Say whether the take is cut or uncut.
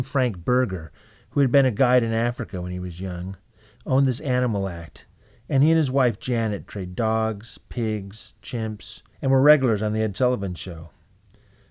cut